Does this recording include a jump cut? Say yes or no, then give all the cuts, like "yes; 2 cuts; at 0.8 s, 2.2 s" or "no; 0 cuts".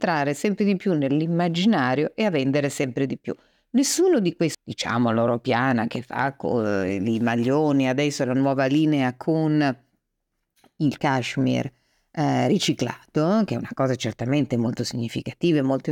yes; 2 cuts; at 4.5 s, 11.0 s